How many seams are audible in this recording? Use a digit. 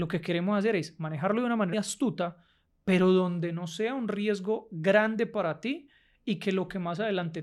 1